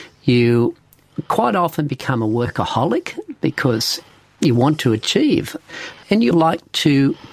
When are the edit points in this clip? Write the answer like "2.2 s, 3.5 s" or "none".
6.3 s